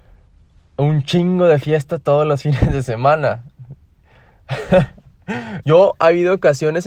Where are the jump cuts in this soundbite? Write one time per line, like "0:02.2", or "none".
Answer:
0:05.6